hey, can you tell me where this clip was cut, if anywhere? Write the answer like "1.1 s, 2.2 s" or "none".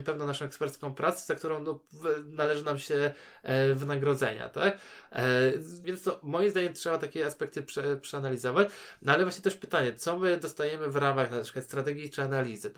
5.8 s